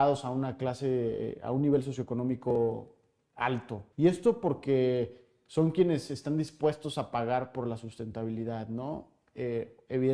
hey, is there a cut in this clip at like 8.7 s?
no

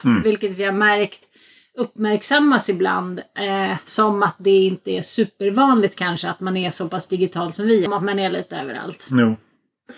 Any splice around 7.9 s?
yes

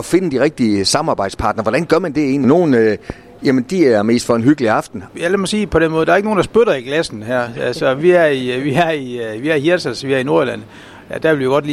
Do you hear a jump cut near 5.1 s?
yes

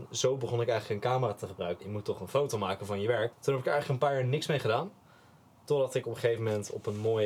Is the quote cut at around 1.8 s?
yes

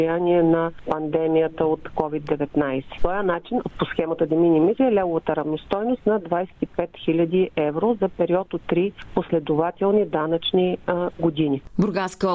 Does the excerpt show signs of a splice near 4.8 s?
yes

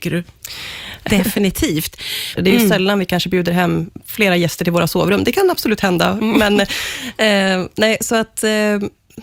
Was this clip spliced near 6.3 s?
no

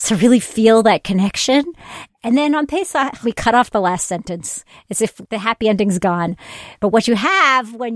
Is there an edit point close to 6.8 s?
no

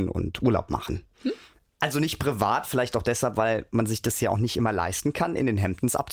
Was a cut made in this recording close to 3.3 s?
no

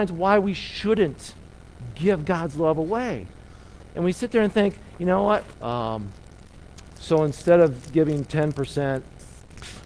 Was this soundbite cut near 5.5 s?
yes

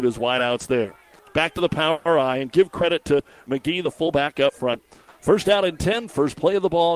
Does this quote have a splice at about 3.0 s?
no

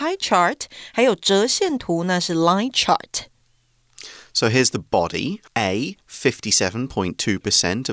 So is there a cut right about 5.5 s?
yes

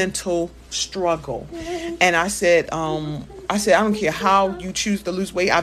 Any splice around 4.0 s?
no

